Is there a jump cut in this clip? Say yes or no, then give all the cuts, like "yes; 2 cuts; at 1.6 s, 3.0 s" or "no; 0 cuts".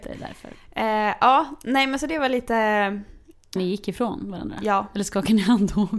yes; 1 cut; at 3.6 s